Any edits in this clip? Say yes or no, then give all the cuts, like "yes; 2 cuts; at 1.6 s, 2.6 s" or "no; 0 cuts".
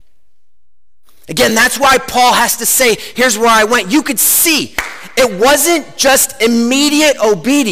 no; 0 cuts